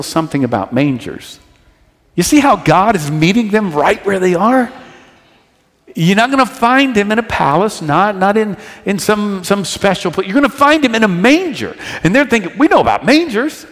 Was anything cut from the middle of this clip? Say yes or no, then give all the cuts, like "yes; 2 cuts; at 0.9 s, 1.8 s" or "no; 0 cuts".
no; 0 cuts